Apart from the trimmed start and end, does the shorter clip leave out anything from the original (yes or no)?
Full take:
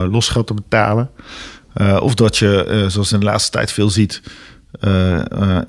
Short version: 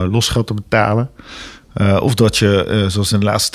no